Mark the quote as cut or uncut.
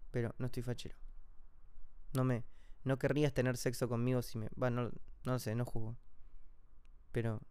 uncut